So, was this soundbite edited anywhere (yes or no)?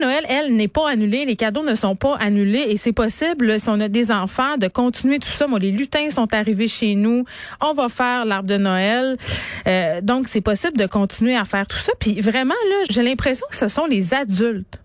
yes